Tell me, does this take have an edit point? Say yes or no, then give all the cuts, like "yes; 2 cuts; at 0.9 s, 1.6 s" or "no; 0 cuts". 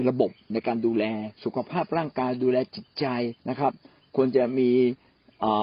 yes; 2 cuts; at 1.3 s, 3.4 s